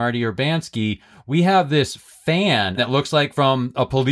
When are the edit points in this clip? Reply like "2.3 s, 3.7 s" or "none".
2.8 s

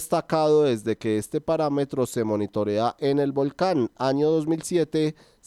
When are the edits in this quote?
none

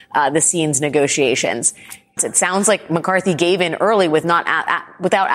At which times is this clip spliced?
2.2 s

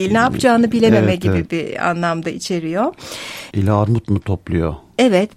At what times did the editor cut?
3.5 s

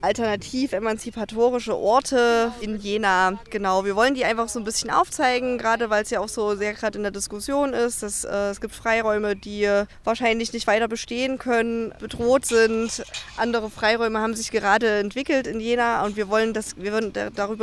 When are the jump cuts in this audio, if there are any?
none

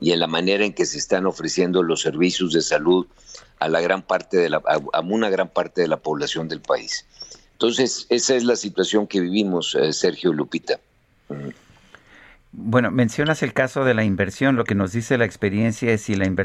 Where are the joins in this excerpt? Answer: none

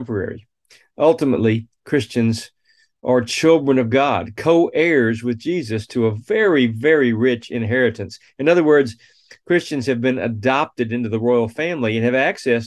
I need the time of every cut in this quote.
none

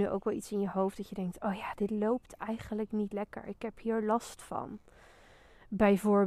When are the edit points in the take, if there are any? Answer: none

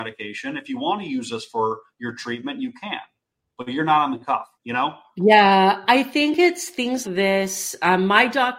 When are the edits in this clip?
4.6 s, 7.0 s

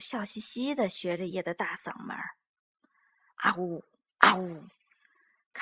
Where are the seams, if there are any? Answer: 1.3 s

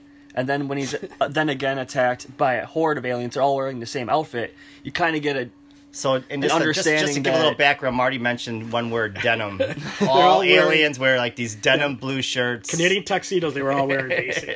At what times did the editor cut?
none

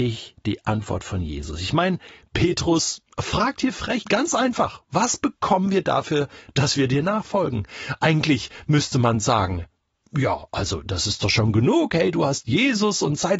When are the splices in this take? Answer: 4.0 s

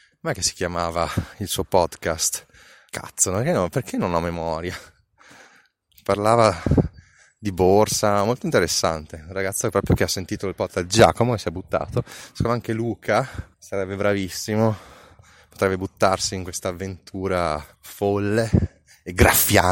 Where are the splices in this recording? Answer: 2.9 s, 13.5 s, 17.7 s

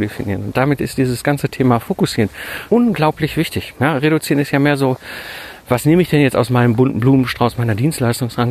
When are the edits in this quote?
2.7 s

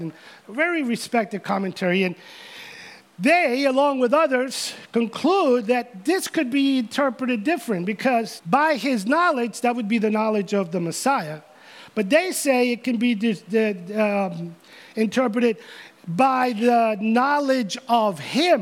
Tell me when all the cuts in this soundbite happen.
8.4 s

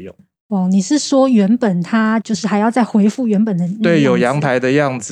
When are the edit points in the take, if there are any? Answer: 2.2 s

